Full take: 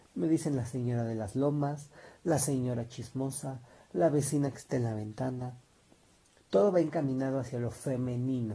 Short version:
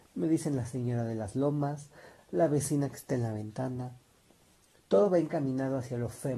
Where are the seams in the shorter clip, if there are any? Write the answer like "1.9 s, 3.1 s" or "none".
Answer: 2.2 s